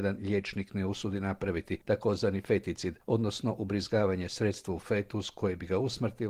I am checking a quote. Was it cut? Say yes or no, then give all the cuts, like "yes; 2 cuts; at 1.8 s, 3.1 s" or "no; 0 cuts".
no; 0 cuts